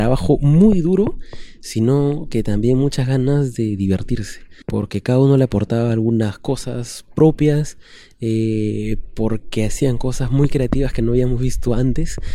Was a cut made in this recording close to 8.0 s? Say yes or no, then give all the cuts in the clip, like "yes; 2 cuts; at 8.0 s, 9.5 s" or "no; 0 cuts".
no; 1 cut; at 4.6 s